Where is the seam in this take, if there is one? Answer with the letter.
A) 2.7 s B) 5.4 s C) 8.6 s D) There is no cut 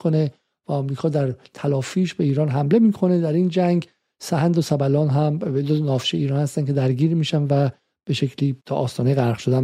C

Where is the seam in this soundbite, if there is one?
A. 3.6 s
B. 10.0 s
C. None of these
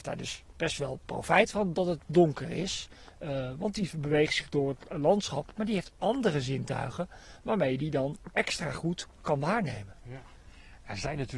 C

